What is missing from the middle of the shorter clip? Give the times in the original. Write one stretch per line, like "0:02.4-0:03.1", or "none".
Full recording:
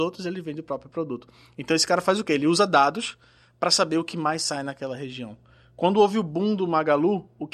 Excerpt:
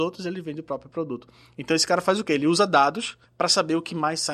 0:03.3-0:03.5